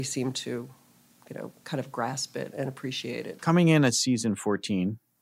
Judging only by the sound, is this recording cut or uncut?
cut